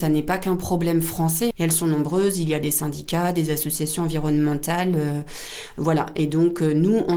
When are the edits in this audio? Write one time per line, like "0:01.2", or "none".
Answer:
0:01.5

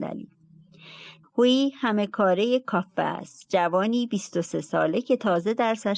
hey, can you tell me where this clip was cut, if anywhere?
0:01.2

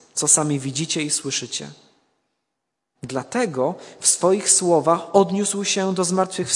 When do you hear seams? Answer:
0:02.9

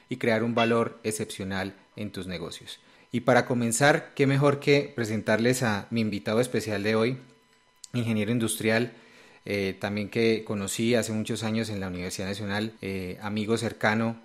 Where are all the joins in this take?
0:03.0
0:12.8

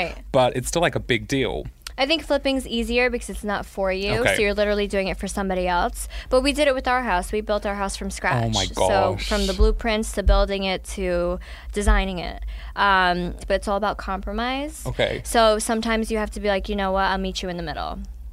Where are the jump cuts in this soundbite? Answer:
0:13.4

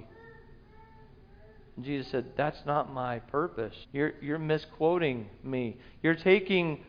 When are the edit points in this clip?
0:03.8

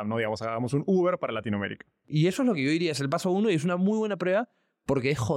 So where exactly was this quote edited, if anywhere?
0:02.0

